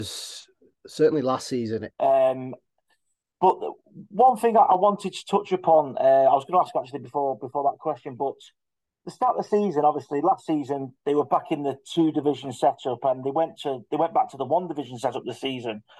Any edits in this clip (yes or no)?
yes